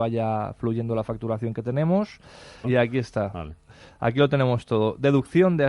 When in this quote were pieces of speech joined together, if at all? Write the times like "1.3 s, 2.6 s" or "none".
2.6 s